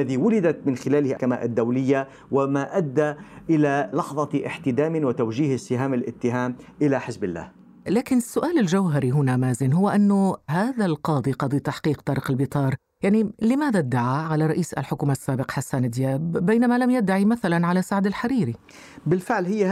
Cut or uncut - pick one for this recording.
cut